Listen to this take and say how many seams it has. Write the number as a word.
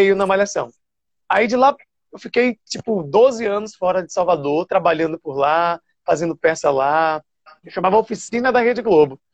two